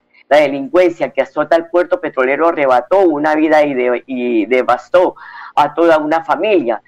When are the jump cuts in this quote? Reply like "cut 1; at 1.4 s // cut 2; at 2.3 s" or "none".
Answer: cut 1; at 5.6 s

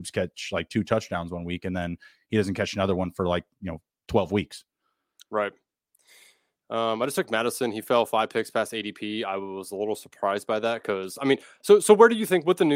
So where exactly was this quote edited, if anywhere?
none

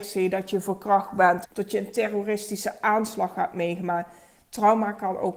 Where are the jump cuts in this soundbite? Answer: cut 1; at 1.4 s

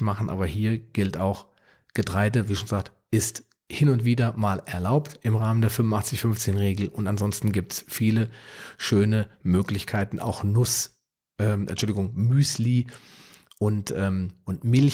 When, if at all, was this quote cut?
none

